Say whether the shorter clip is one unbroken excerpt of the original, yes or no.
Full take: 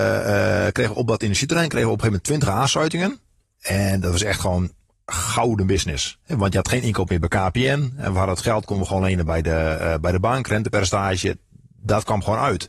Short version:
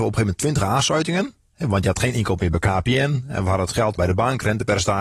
no